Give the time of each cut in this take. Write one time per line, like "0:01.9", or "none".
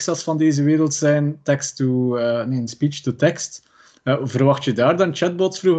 none